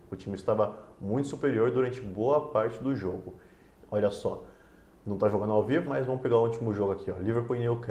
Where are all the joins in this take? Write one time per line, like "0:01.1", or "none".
0:03.7
0:05.9